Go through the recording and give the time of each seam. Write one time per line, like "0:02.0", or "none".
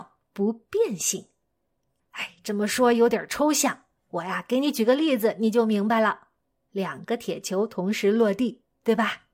0:06.7